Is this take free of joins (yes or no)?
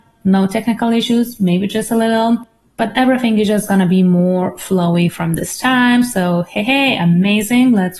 yes